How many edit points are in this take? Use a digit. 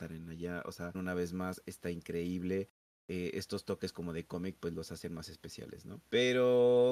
1